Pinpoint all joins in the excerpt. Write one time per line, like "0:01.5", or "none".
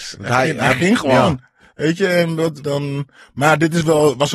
0:02.6